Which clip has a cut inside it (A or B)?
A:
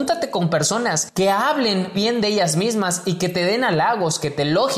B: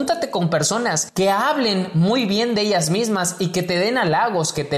A